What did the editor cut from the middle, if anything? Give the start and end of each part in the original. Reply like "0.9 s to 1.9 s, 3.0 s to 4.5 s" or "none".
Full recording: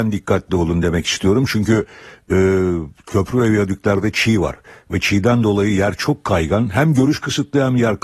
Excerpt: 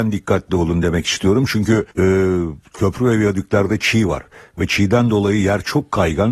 1.9 s to 2.2 s